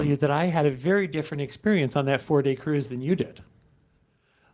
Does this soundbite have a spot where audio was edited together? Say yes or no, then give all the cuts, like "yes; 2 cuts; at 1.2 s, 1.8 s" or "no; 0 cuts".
no; 0 cuts